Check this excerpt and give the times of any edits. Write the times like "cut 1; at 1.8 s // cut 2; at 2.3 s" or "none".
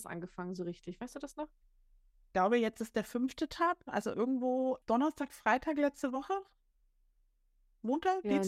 cut 1; at 4.8 s